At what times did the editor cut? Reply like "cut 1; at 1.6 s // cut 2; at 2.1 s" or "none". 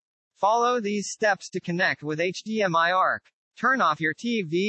none